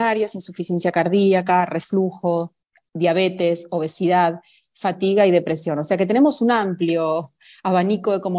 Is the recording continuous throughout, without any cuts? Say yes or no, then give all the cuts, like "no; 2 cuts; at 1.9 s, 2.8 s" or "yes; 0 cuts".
yes; 0 cuts